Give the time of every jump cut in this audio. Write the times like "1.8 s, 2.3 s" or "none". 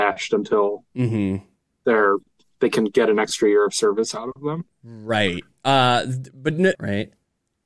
6.8 s